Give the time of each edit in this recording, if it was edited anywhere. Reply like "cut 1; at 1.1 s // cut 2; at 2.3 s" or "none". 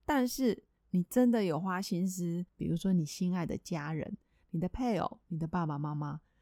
cut 1; at 2.5 s